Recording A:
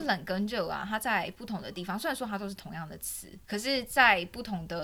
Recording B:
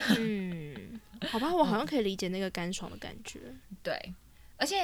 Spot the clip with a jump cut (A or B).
A